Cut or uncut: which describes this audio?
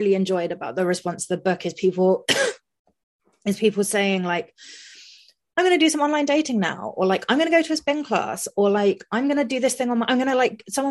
uncut